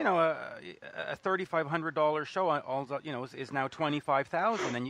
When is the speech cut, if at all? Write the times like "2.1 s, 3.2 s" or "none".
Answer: none